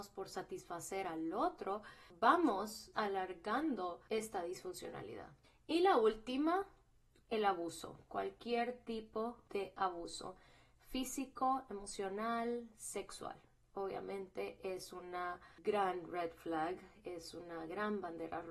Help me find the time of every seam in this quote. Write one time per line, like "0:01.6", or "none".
none

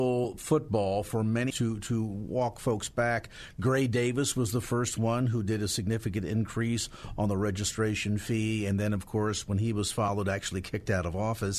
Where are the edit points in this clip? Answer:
0:01.5

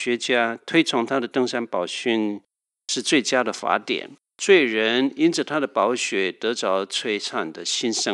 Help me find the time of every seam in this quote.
0:04.3

